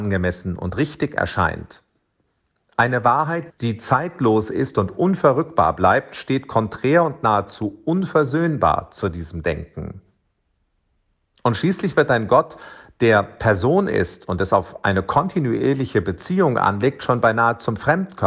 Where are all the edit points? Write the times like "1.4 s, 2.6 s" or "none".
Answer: 3.5 s

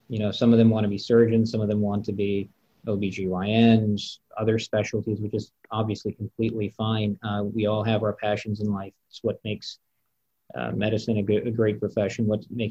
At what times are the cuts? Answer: none

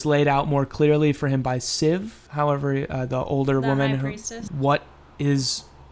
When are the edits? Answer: 2.3 s, 4.5 s

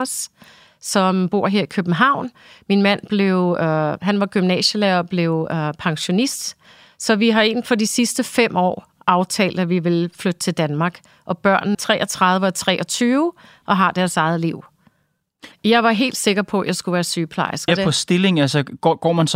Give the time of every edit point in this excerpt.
11.7 s, 15.5 s, 17.7 s

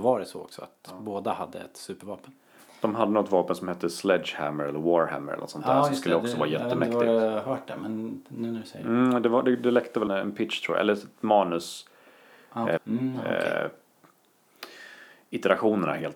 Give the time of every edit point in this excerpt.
10.1 s, 12.8 s

